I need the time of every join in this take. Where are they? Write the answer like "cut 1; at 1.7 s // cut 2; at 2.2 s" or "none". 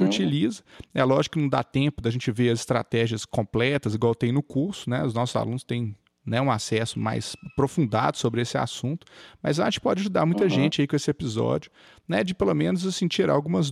none